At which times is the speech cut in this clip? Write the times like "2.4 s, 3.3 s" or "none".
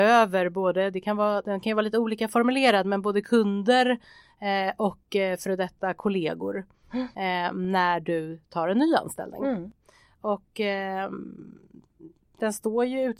none